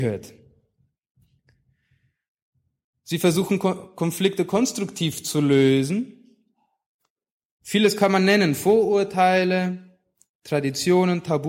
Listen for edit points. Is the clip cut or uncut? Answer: cut